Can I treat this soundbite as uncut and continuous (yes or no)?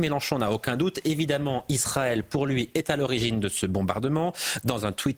yes